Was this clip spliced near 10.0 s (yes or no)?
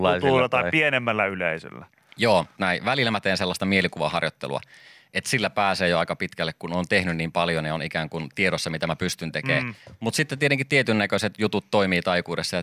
no